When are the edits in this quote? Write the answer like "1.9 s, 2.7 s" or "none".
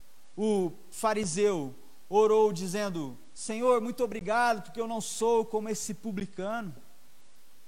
none